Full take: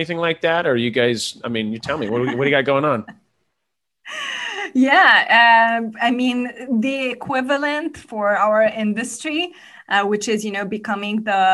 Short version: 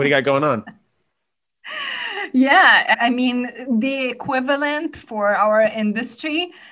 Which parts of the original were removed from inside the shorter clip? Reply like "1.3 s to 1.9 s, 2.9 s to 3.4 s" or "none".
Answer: 5.3 s to 5.9 s